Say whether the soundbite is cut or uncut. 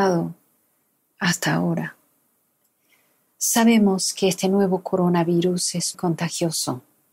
cut